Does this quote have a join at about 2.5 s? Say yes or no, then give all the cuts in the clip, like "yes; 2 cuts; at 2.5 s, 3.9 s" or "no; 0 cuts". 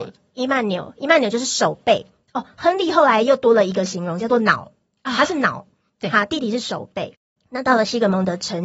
no; 1 cut; at 7.4 s